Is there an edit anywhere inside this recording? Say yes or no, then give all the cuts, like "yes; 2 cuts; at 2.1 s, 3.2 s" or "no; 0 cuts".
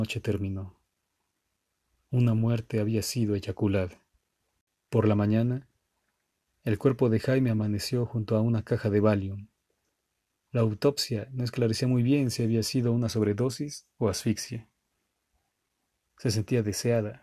yes; 1 cut; at 16.0 s